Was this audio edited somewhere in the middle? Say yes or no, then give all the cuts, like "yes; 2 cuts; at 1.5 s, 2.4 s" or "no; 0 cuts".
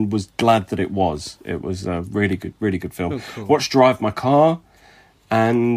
no; 0 cuts